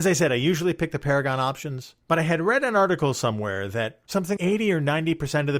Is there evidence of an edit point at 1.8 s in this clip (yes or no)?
no